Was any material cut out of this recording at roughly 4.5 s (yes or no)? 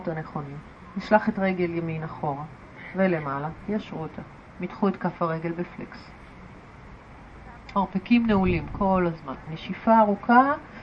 no